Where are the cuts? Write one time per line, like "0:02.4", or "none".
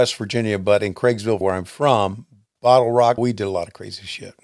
0:01.4
0:03.2